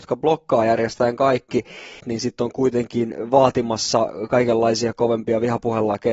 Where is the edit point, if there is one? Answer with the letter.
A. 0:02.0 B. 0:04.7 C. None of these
A